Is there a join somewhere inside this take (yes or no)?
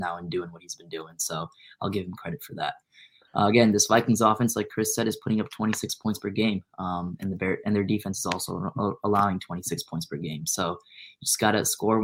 no